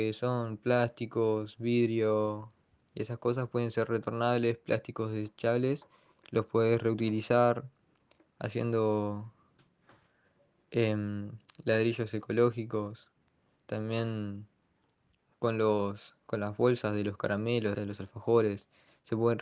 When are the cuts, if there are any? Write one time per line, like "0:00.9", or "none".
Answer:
0:17.7